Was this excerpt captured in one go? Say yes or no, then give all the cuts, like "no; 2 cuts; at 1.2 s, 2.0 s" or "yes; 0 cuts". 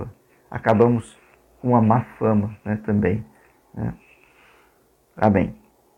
yes; 0 cuts